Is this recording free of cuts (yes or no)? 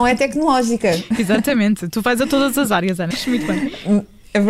no